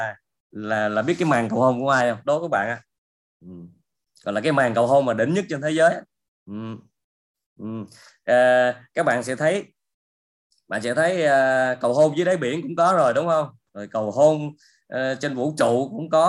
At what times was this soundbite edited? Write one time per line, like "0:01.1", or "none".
none